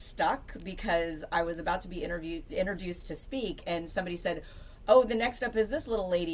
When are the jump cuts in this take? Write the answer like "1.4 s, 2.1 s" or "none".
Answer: none